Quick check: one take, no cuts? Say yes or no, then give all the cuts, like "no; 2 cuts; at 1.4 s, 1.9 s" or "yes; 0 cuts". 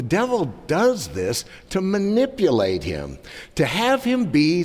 yes; 0 cuts